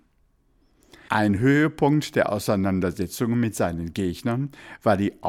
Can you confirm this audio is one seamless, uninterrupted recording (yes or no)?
no